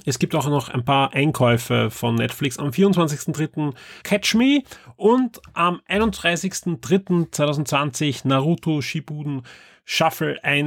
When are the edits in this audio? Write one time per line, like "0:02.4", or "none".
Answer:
0:04.0